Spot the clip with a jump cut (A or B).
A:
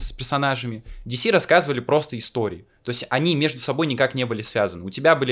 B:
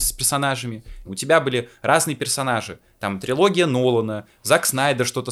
B